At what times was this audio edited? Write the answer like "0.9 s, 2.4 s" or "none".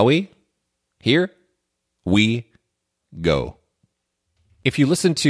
none